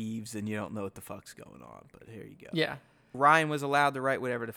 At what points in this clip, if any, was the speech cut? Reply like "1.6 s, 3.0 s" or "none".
3.1 s